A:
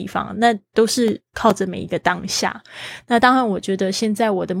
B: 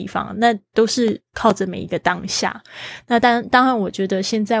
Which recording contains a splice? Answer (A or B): A